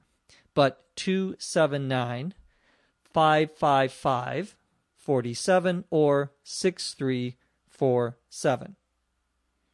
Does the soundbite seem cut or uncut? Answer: cut